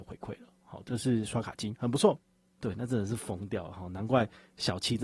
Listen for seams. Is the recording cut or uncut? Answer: cut